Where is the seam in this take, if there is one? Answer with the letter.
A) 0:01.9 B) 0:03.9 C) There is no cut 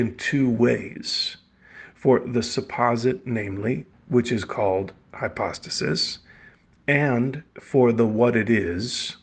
B